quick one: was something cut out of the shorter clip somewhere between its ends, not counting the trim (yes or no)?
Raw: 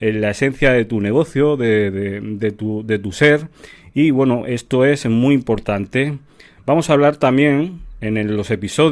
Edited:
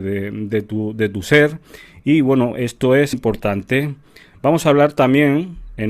yes